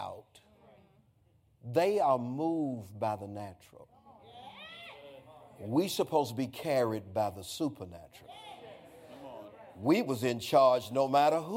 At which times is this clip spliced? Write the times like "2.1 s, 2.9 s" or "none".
none